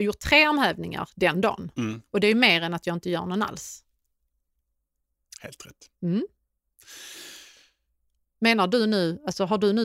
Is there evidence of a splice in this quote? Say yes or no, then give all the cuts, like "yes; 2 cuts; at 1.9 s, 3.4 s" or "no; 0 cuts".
no; 0 cuts